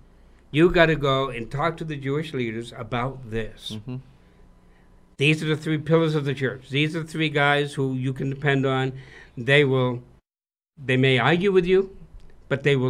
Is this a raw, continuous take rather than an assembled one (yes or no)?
yes